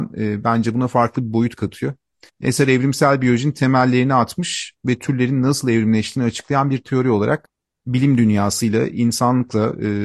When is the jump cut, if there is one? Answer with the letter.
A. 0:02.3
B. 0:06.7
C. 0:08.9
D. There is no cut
A